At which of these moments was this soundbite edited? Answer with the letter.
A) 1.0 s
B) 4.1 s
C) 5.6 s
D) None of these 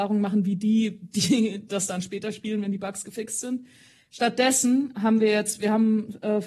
D